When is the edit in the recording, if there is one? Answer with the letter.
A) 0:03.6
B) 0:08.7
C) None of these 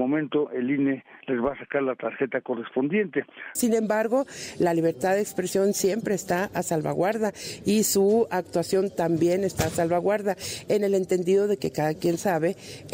A